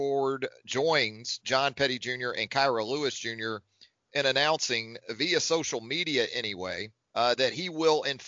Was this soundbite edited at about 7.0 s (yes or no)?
yes